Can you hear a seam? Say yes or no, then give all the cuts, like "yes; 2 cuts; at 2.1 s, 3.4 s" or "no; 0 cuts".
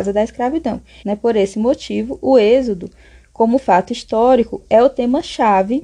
yes; 1 cut; at 1.0 s